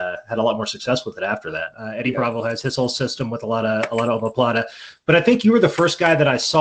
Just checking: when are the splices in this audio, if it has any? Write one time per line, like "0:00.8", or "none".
0:01.7